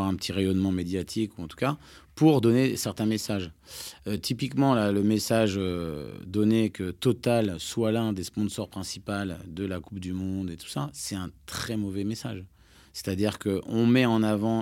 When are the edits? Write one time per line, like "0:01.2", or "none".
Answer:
none